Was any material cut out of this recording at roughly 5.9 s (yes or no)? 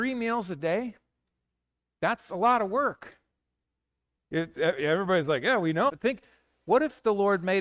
yes